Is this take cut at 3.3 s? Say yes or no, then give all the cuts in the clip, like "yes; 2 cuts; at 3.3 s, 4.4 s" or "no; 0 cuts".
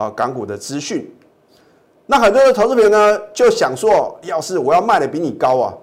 no; 1 cut; at 2.0 s